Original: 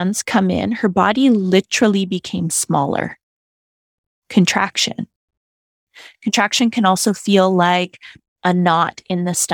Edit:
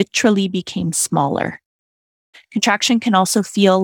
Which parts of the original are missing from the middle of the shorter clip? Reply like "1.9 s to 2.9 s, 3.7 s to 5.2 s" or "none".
3.9 s to 6.0 s